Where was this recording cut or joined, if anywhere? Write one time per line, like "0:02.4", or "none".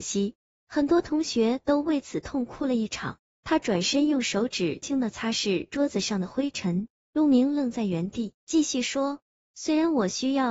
0:04.8
0:08.4